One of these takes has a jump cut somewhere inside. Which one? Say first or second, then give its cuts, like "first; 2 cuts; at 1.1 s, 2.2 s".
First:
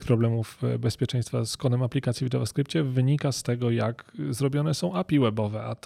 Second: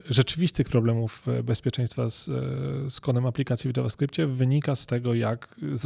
first; 1 cut; at 1.5 s